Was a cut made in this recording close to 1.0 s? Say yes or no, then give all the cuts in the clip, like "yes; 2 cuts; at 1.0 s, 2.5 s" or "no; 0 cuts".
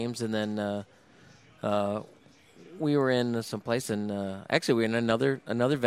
no; 0 cuts